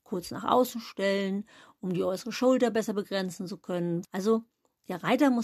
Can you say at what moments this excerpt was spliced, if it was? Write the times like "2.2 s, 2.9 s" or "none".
4.0 s